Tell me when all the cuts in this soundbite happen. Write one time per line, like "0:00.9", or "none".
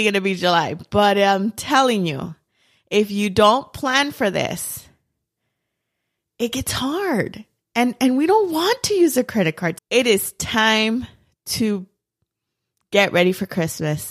0:09.8